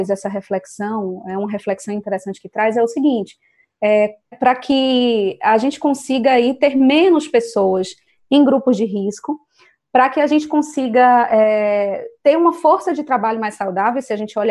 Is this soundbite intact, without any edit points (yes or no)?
no